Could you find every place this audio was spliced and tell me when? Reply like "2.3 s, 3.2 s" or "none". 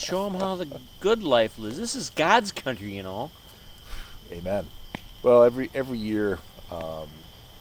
5.2 s